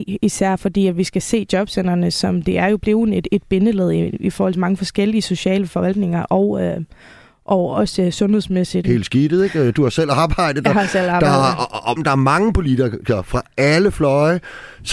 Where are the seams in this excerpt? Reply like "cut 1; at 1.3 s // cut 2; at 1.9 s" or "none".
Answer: cut 1; at 8.8 s // cut 2; at 12.0 s

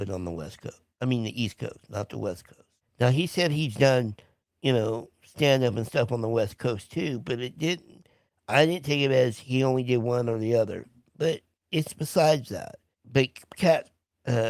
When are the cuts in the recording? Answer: none

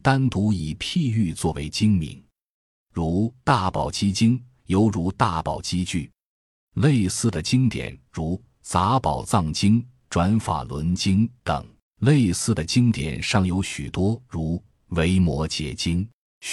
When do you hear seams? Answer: cut 1; at 11.8 s // cut 2; at 14.2 s

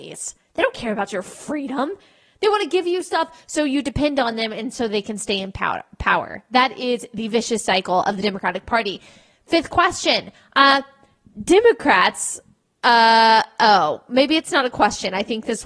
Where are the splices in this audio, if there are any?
none

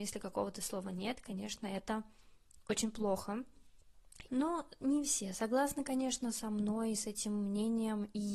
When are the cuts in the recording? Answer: cut 1; at 4.3 s

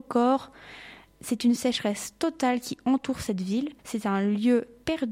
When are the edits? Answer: cut 1; at 3.8 s

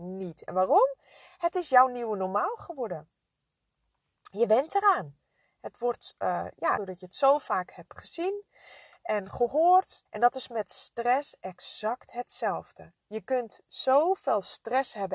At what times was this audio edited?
cut 1; at 6.8 s // cut 2; at 10.1 s // cut 3; at 13.0 s

